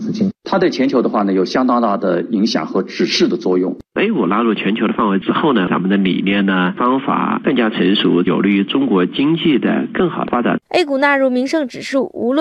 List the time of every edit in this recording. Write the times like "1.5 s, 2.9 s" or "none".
none